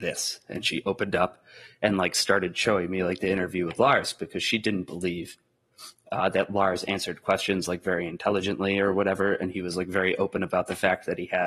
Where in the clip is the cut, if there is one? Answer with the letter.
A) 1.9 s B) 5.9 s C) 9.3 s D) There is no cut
D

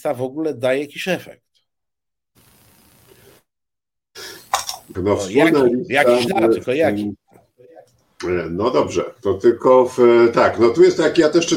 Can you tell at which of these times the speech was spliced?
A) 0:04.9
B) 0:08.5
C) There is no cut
A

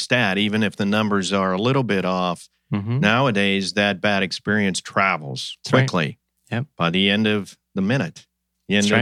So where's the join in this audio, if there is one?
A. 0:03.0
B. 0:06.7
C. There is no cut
C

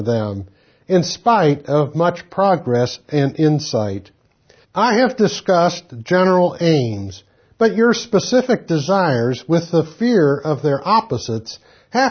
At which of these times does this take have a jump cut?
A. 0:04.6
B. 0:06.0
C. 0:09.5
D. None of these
A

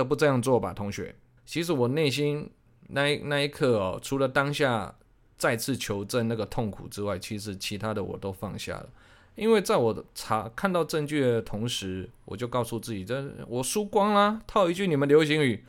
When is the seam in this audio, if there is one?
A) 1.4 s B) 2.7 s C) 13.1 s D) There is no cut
A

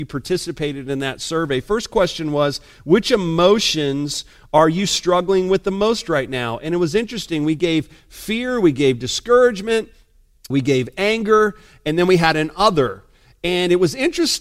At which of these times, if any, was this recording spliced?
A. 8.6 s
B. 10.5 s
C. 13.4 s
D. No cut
B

